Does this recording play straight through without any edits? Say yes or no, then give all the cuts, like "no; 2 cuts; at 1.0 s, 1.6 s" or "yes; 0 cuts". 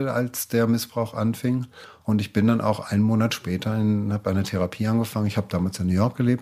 no; 1 cut; at 2.0 s